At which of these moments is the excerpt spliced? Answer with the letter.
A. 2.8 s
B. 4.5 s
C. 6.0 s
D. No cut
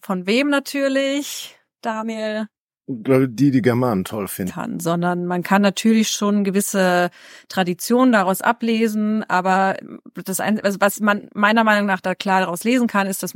B